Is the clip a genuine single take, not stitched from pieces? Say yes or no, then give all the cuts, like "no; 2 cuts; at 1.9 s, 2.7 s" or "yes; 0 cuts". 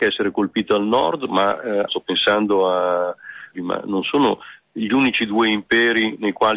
no; 2 cuts; at 1.9 s, 3.5 s